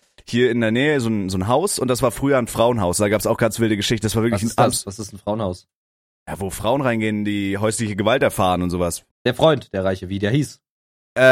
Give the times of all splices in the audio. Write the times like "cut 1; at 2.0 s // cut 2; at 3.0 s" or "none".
cut 1; at 9.1 s

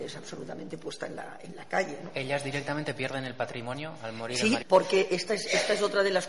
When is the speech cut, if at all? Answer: cut 1; at 4.6 s

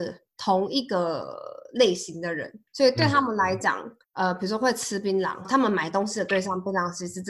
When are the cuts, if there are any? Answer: cut 1; at 2.7 s // cut 2; at 5.4 s

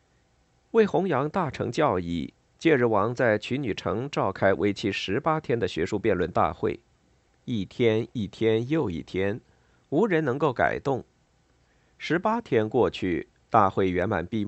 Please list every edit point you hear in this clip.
cut 1; at 7.3 s

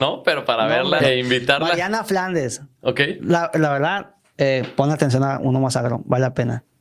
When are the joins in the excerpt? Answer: cut 1; at 1.0 s // cut 2; at 4.3 s

